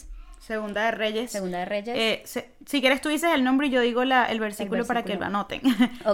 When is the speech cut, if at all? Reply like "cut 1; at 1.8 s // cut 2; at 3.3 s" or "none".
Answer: none